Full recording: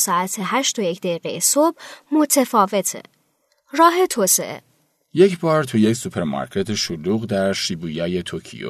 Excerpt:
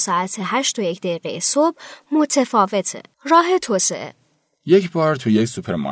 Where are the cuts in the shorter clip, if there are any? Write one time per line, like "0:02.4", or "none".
0:03.1